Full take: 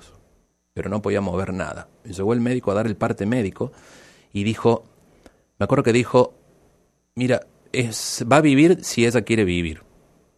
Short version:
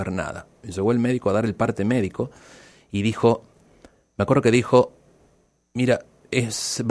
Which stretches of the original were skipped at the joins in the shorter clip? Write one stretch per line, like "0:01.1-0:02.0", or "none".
none